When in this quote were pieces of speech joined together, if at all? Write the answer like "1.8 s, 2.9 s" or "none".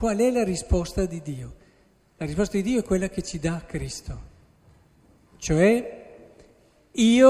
none

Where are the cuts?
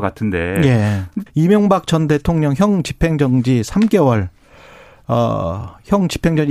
1.3 s

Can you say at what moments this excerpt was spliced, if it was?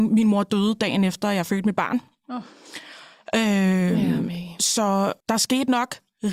5.2 s

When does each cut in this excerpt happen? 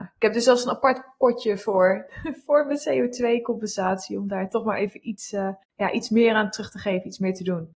5.6 s

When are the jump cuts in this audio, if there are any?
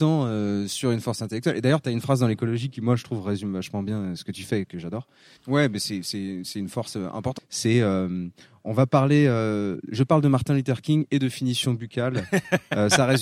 5.4 s, 7.4 s

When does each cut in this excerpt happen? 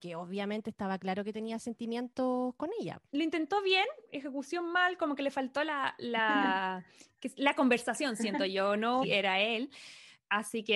3.1 s, 9.0 s

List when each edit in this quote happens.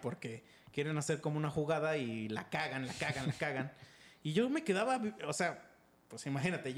none

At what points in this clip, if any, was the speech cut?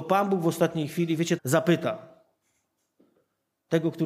1.4 s

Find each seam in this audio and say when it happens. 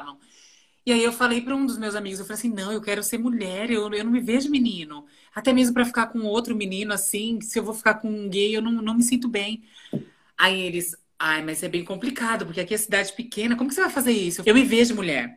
14.4 s

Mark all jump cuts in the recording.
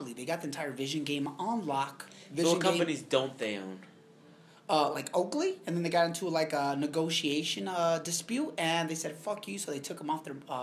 none

